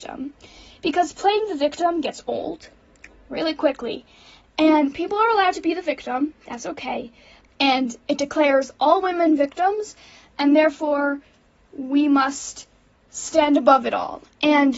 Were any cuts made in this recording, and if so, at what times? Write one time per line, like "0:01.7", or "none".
0:07.4